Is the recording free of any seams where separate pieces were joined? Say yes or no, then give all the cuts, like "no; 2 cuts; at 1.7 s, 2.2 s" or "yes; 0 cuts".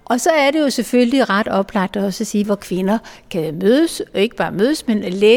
no; 1 cut; at 2.4 s